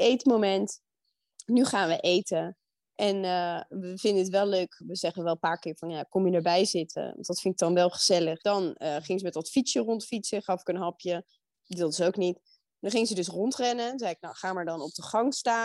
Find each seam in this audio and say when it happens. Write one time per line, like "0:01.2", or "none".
0:08.4

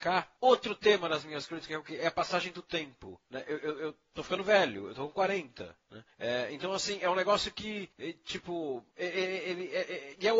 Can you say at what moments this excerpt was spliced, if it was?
none

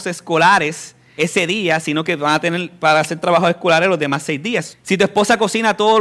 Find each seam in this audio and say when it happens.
0:01.2
0:04.7

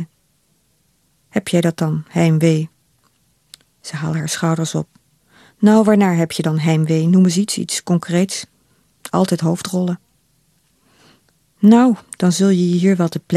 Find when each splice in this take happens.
0:08.9

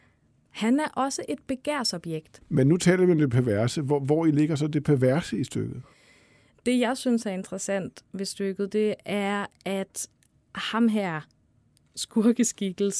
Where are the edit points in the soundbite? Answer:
0:02.4

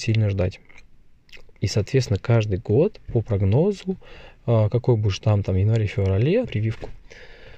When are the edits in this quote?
0:01.5
0:06.4

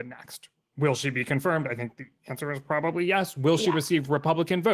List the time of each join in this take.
none

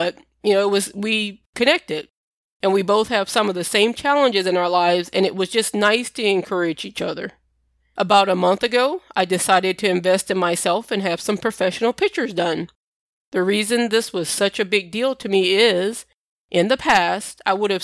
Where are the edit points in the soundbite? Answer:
none

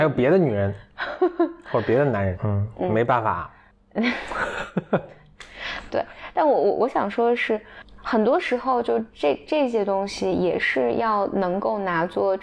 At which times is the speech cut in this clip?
0:02.3

